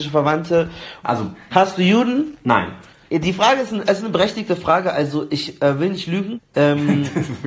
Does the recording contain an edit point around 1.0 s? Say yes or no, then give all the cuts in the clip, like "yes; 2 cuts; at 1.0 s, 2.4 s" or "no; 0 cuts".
yes; 1 cut; at 1.0 s